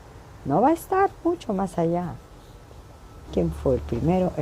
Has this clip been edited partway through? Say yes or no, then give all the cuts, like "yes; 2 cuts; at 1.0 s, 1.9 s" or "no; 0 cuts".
yes; 1 cut; at 3.3 s